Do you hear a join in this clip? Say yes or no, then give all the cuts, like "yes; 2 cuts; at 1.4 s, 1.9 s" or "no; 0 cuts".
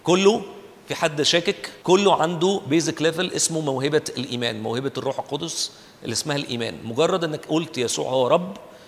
yes; 1 cut; at 1.8 s